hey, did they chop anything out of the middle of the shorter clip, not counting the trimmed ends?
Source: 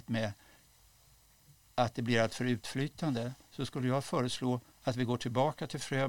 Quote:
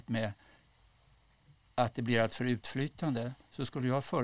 no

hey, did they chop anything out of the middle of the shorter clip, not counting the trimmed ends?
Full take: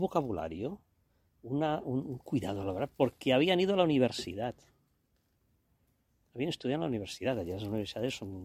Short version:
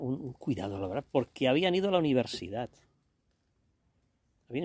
no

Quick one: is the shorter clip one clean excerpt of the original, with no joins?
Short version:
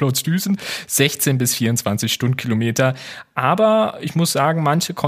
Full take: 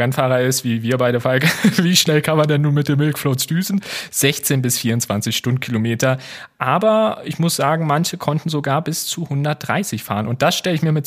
yes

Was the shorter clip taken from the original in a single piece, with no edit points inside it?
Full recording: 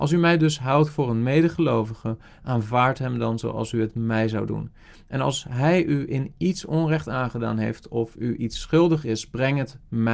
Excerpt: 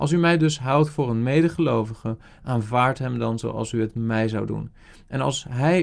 yes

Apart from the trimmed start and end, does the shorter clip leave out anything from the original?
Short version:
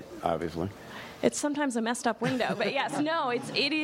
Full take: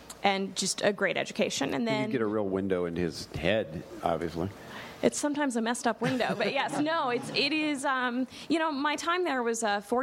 no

